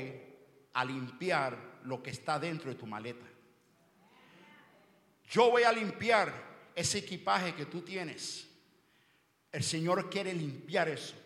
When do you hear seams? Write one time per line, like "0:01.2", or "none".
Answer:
none